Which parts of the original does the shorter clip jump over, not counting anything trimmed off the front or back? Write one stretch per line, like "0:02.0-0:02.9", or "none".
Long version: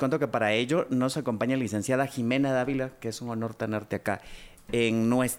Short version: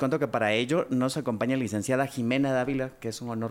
none

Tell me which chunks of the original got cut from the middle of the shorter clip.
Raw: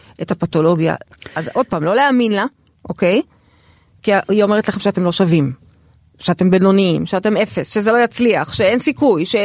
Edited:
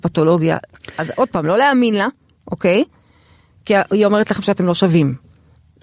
none

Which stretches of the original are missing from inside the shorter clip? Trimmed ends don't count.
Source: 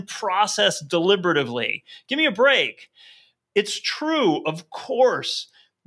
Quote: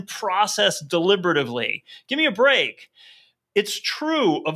none

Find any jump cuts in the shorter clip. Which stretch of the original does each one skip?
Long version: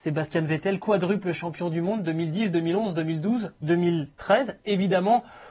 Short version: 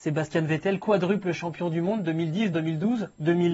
0:02.5-0:02.9

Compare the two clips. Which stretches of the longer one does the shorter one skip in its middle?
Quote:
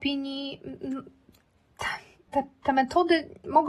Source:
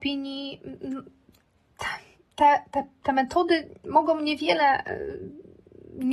0:02.3-0:02.7

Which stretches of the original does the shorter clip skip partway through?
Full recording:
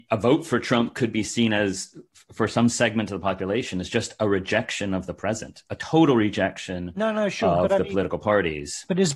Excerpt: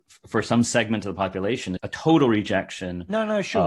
0:03.8-0:05.6

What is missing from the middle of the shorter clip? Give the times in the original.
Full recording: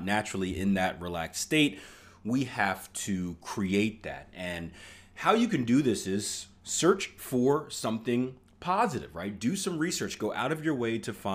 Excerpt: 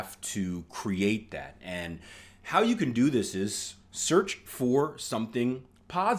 none

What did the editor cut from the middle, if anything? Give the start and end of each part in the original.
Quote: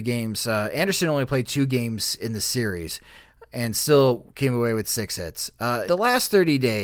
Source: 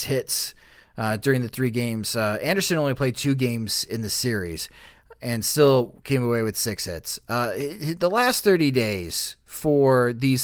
0:07.5-0:08.0

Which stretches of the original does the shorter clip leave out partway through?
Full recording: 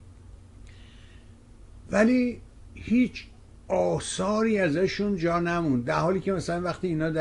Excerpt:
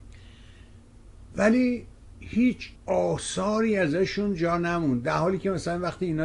0:03.3-0:03.6

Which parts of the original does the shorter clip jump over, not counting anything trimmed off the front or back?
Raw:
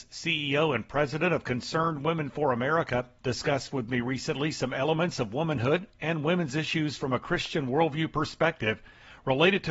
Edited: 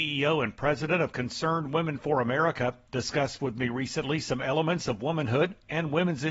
none

